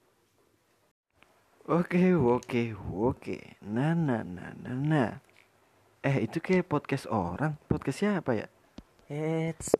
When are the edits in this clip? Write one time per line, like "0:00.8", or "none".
none